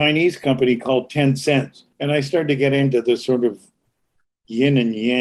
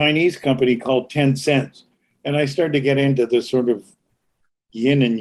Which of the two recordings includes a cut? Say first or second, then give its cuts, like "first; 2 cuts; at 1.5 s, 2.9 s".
first; 1 cut; at 1.9 s